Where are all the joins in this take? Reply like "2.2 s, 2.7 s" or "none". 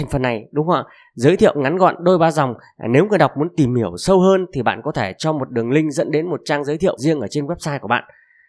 7.0 s